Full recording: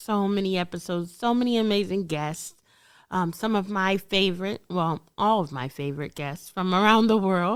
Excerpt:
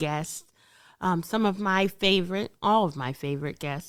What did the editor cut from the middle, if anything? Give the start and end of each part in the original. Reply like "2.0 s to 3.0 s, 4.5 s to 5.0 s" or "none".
4.6 s to 5.1 s